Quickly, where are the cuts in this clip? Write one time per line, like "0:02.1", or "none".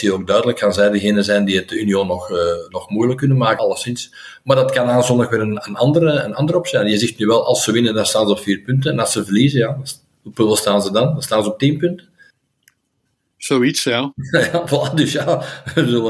0:03.6